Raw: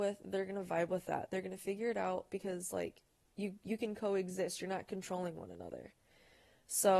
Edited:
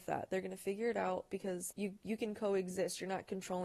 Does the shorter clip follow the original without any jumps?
no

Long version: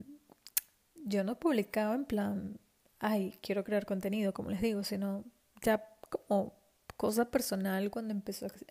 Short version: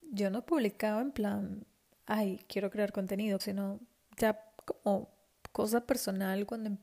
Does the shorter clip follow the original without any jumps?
no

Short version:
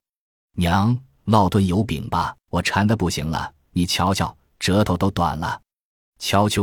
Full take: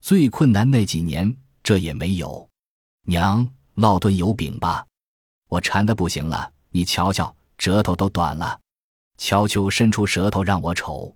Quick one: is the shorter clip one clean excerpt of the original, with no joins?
no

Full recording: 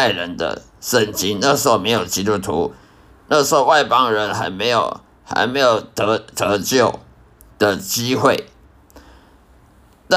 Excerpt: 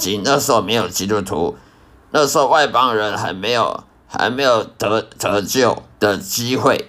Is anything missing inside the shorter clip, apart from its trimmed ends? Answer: yes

